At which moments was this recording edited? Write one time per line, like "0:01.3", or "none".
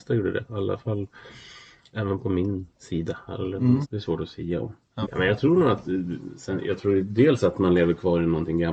0:02.7
0:03.8
0:05.0